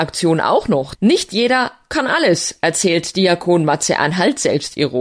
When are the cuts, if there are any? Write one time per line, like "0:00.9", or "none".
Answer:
0:00.9